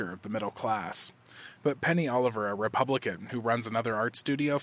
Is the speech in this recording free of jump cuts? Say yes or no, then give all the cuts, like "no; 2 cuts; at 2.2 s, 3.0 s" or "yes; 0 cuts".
yes; 0 cuts